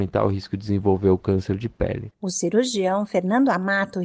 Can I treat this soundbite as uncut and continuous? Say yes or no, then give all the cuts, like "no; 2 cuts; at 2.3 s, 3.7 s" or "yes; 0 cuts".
yes; 0 cuts